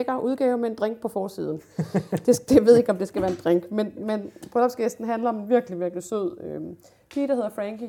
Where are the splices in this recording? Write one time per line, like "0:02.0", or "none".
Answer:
none